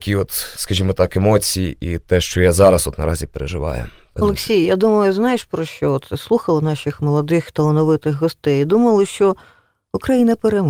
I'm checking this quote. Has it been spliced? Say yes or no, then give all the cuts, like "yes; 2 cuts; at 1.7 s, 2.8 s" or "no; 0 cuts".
no; 0 cuts